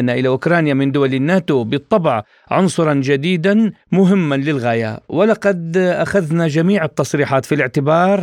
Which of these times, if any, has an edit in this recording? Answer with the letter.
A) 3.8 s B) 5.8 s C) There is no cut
A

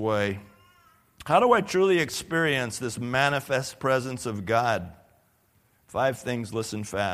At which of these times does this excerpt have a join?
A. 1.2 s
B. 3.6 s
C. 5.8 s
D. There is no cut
D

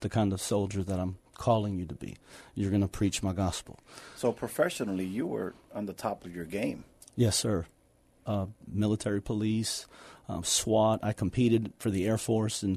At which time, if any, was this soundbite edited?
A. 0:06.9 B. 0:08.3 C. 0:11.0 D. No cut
B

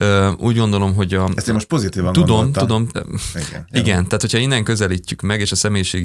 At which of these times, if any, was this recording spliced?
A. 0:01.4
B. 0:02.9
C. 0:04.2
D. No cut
B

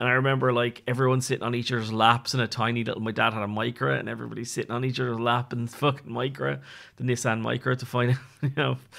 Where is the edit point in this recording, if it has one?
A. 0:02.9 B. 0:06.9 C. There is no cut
C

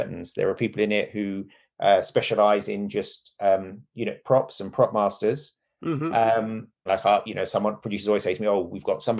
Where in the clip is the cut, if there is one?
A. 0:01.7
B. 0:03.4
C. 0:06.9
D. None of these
C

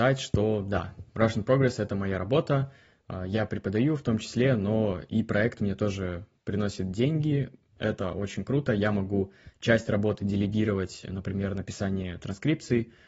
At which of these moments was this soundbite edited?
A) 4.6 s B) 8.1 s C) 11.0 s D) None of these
D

